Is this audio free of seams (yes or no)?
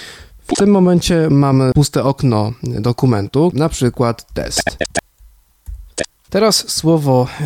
no